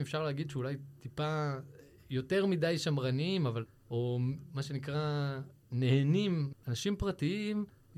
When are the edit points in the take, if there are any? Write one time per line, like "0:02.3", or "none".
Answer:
0:06.5